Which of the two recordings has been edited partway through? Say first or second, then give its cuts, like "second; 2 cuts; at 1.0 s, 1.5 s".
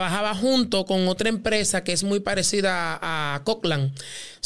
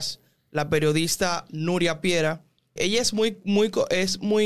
second; 1 cut; at 2.8 s